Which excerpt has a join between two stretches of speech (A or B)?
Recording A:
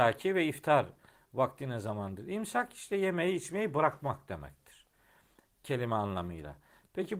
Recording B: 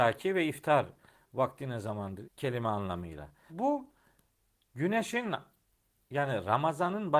B